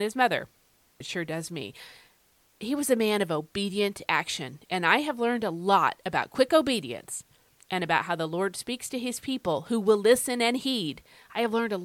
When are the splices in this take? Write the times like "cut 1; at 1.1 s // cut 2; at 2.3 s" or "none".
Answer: cut 1; at 1.0 s